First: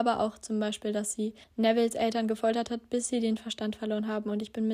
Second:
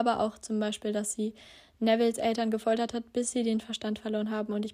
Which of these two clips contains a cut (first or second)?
first